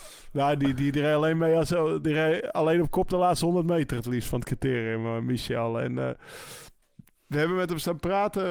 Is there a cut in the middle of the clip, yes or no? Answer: no